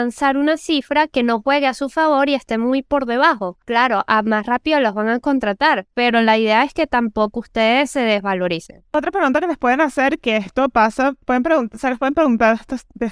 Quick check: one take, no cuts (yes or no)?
yes